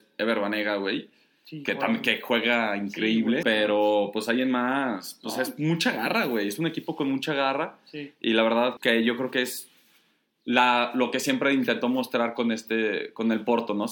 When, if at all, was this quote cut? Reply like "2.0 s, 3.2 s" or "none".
3.4 s, 8.8 s